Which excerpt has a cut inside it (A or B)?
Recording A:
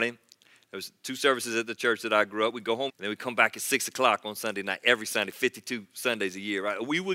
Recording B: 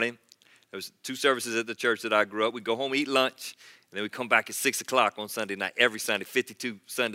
A